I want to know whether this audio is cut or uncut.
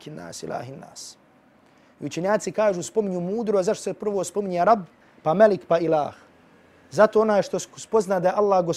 uncut